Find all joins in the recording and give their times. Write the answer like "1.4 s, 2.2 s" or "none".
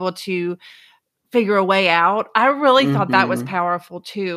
none